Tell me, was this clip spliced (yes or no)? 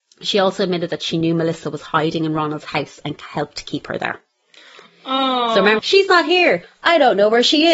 yes